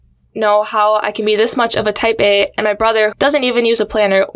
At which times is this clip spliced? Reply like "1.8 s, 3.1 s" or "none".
3.1 s